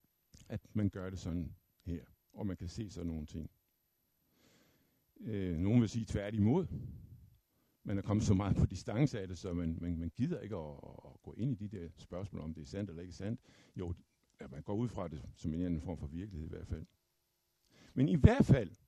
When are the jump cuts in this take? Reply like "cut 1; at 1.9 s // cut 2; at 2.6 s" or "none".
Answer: none